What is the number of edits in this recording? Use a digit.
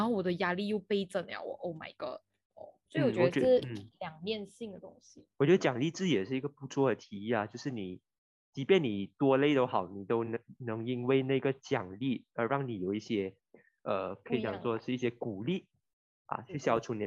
0